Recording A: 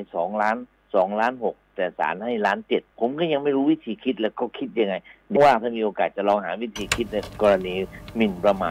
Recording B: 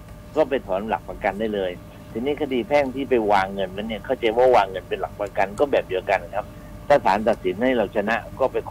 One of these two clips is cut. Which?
A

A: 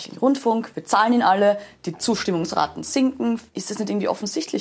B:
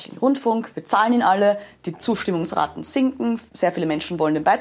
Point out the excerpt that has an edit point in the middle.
A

